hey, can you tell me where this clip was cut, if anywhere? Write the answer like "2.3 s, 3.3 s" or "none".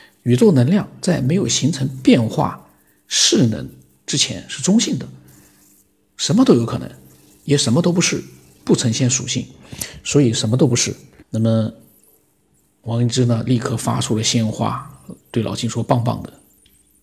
11.2 s, 15.2 s